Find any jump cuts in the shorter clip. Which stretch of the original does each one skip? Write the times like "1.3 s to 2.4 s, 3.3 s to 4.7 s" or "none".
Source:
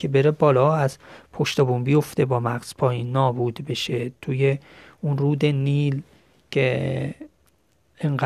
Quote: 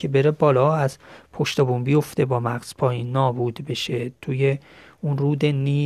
none